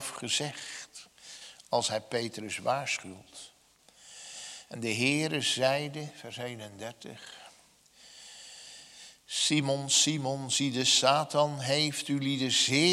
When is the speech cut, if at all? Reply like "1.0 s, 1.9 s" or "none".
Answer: none